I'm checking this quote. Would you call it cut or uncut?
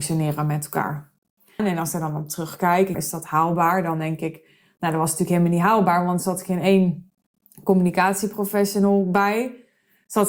cut